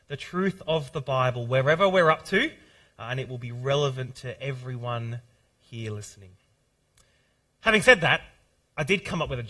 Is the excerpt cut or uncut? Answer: uncut